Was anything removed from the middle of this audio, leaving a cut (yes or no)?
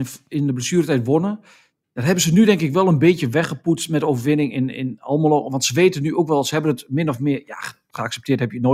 no